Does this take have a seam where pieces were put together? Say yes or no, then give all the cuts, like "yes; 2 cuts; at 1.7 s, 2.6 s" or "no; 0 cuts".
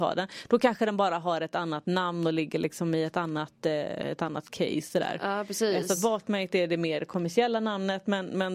no; 0 cuts